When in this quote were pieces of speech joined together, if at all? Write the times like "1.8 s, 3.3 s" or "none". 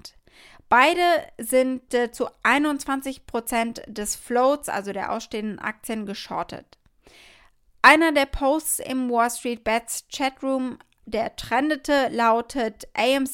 none